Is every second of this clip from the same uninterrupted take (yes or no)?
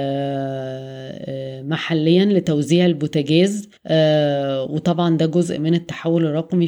no